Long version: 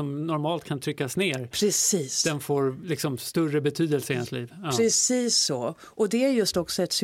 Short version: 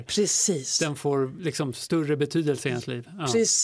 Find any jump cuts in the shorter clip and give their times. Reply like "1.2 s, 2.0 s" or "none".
none